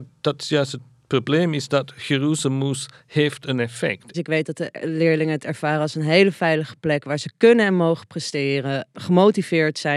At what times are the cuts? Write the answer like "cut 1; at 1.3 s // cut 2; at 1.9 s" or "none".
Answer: cut 1; at 4.1 s